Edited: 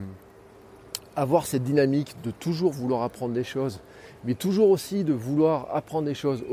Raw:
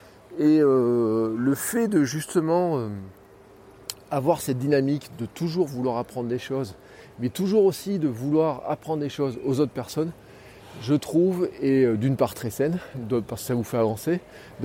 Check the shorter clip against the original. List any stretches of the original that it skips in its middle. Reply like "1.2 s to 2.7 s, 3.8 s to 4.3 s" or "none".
none